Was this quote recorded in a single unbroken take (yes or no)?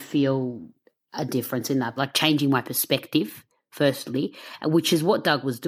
no